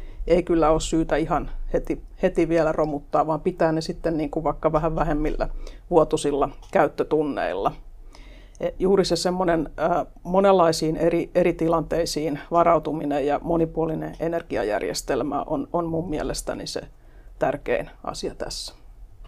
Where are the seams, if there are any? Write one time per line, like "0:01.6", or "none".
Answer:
0:08.8